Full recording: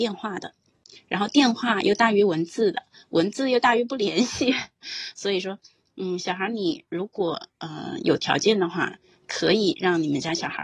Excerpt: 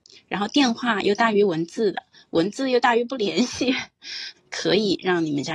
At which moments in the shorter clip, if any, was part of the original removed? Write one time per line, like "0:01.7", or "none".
0:04.3